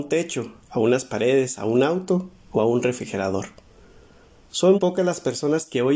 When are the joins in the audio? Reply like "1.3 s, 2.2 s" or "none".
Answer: 4.7 s